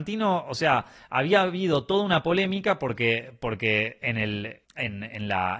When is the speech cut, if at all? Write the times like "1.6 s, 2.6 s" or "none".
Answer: 4.6 s